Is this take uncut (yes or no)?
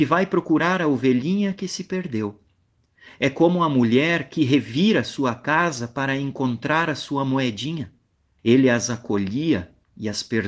no